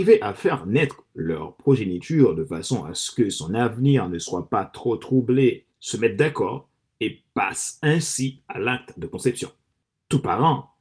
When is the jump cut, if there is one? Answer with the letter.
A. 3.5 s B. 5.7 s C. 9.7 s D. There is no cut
B